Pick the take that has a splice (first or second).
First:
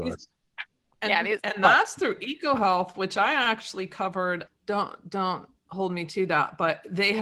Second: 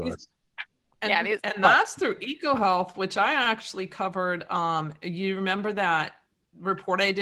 first